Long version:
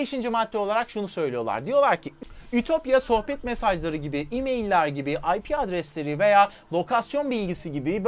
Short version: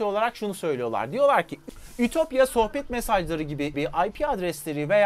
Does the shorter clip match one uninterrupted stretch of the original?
no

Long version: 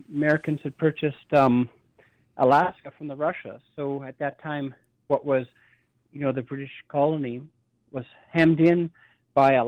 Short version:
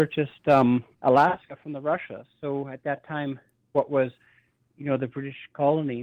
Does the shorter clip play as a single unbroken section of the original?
no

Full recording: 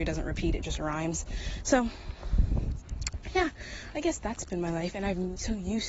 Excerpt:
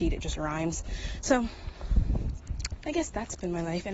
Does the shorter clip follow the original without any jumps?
no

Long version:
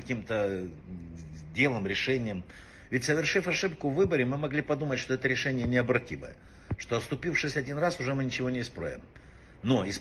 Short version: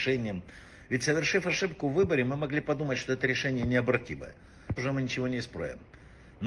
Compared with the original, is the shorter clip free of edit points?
no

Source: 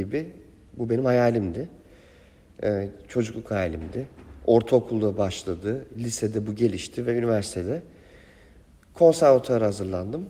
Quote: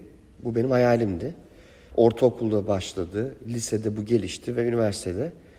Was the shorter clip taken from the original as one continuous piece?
no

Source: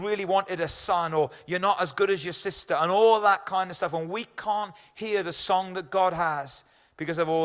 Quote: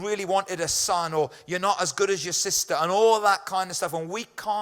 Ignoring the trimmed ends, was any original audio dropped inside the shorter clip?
no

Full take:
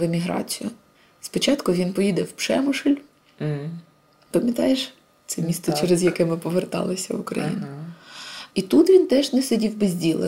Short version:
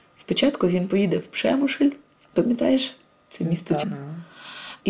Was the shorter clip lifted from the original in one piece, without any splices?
no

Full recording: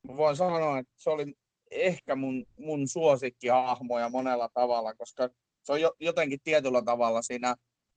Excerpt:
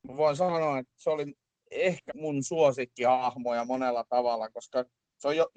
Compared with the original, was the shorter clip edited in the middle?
yes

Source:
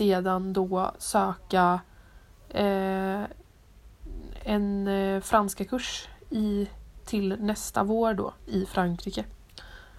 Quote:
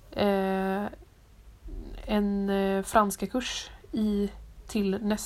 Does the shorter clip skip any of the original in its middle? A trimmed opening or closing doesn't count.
no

